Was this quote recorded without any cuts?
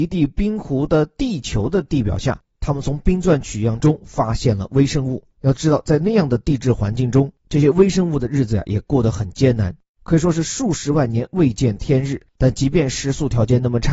yes; 0 cuts

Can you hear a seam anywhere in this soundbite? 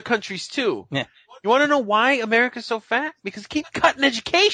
no; 0 cuts

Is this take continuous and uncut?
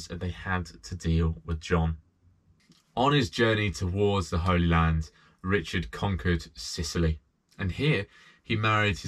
yes; 0 cuts

